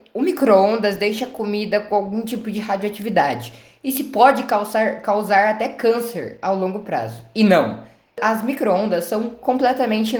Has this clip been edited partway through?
no; 0 cuts

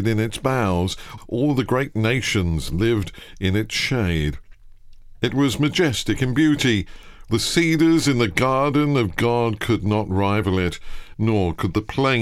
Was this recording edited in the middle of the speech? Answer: yes; 3 cuts; at 1.2 s, 7.3 s, 11.1 s

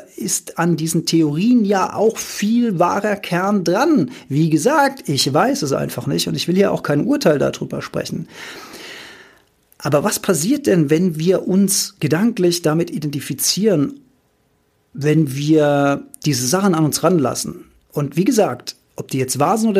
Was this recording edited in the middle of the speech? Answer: no; 0 cuts

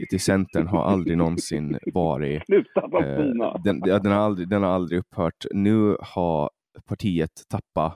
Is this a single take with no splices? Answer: yes; 0 cuts

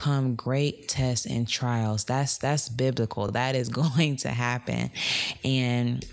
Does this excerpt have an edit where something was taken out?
no; 0 cuts

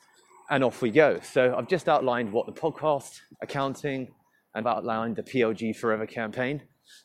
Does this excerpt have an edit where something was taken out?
yes; 2 cuts; at 3.3 s, 4.6 s

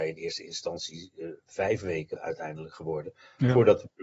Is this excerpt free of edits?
no; 1 cut; at 2.2 s

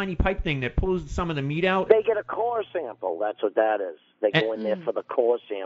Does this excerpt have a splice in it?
yes; 1 cut; at 1.9 s

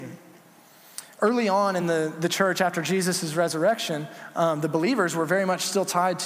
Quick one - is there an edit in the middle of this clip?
no; 0 cuts

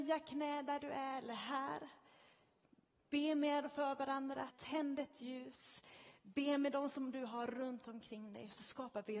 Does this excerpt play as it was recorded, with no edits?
no; 1 cut; at 4.5 s

